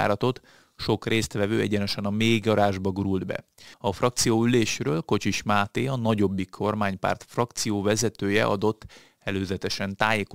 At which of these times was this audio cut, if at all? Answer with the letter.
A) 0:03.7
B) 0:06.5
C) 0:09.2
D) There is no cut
A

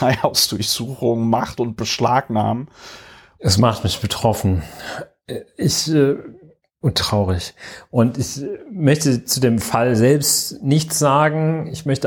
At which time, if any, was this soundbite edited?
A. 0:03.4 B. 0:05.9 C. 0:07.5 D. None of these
A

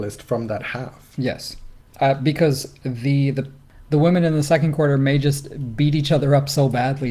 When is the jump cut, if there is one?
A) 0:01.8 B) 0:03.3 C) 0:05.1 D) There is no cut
D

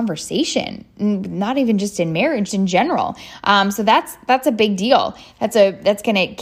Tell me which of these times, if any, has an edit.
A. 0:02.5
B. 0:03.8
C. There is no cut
A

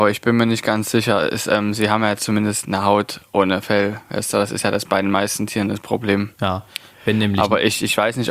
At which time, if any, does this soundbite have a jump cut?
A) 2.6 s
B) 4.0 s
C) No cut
A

